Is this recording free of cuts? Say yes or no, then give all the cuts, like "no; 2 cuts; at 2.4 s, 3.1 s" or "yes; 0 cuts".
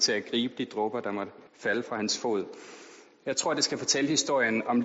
no; 1 cut; at 1.5 s